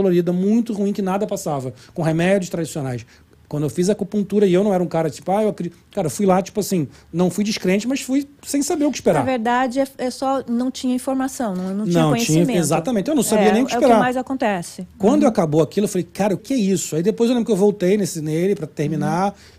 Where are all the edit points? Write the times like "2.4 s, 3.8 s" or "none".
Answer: 8.4 s, 16.4 s